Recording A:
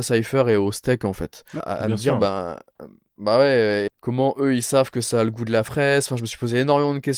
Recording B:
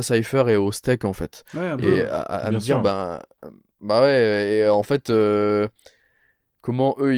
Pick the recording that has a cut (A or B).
A